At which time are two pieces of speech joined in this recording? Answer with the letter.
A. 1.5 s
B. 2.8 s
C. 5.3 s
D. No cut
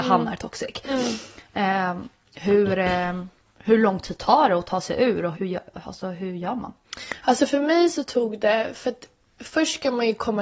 C